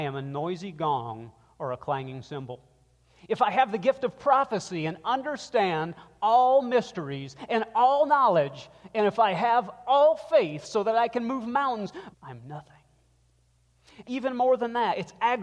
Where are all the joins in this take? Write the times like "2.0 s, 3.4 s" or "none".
12.1 s, 14.0 s